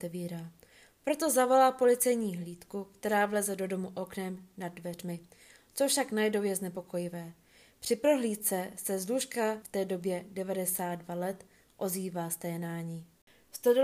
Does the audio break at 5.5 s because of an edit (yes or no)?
no